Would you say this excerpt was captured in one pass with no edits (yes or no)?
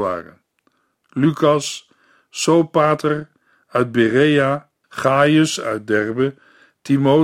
no